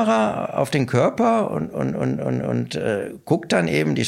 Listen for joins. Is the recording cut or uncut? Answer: uncut